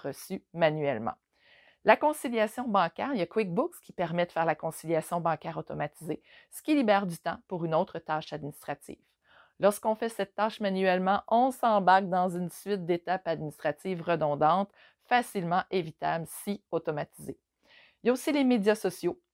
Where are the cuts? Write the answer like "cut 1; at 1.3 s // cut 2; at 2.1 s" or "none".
none